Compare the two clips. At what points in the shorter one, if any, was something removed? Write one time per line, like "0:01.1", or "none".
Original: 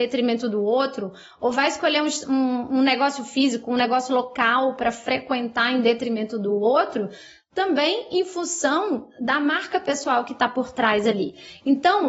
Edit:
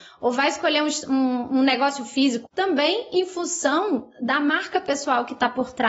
0:02.5